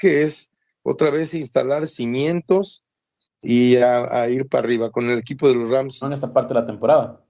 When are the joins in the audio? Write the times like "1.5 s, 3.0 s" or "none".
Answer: 6.0 s